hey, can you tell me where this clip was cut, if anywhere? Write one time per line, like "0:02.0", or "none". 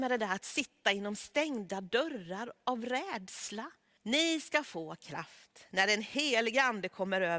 0:04.0